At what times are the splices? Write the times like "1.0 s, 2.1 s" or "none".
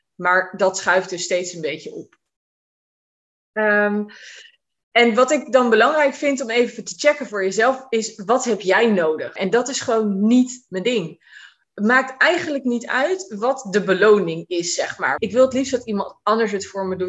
9.4 s, 15.2 s